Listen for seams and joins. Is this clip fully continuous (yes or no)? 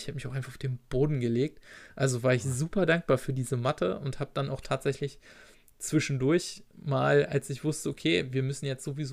yes